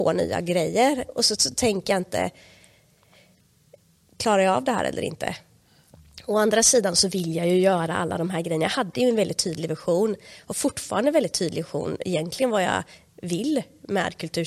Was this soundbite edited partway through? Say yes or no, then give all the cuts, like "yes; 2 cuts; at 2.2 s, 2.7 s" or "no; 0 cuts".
no; 0 cuts